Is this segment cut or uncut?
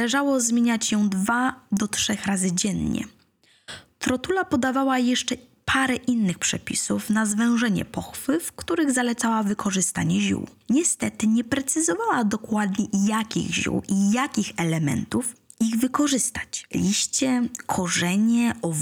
uncut